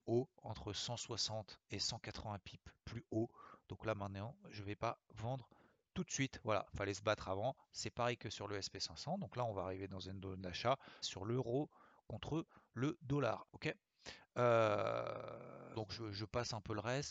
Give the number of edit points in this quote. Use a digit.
3